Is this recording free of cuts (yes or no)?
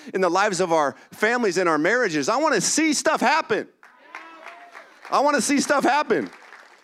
yes